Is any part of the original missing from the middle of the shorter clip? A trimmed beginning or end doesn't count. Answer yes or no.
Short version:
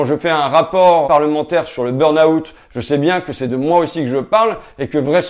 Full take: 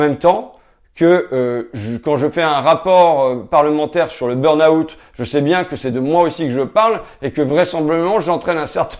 yes